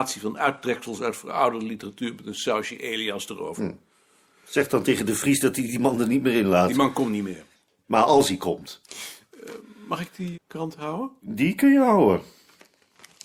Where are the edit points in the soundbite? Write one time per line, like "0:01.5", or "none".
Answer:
0:10.3